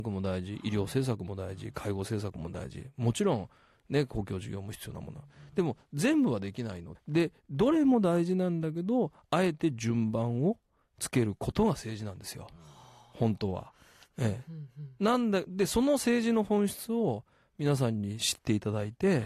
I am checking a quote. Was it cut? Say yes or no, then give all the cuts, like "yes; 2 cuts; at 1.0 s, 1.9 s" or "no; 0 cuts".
yes; 1 cut; at 7.0 s